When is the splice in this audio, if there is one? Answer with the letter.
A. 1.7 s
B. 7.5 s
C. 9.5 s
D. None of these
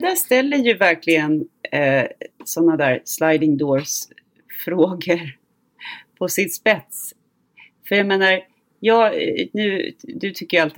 D